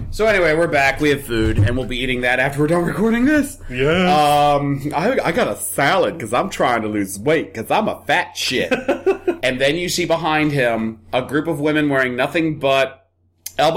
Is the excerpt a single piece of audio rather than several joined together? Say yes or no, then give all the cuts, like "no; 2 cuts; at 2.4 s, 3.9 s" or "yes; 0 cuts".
no; 1 cut; at 9.4 s